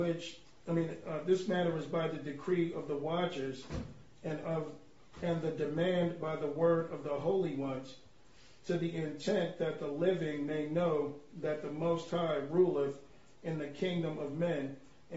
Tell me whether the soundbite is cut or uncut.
uncut